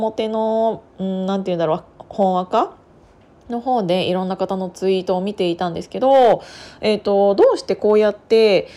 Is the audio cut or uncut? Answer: uncut